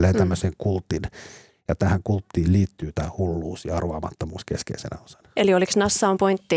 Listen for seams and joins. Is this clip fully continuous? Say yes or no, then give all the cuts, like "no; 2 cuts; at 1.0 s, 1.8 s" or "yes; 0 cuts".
yes; 0 cuts